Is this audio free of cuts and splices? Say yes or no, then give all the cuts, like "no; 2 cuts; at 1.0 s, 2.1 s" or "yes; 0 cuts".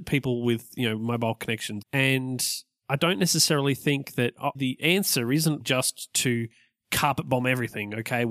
no; 3 cuts; at 1.8 s, 4.5 s, 5.6 s